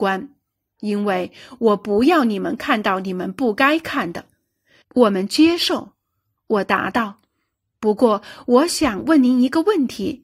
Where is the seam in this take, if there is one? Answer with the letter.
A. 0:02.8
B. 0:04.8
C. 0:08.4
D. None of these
B